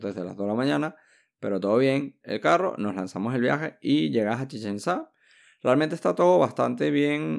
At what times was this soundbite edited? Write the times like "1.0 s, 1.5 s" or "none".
2.2 s